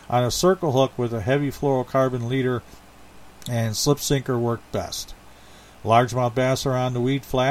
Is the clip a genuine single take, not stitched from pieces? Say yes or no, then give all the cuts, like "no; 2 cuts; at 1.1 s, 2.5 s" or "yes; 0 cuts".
yes; 0 cuts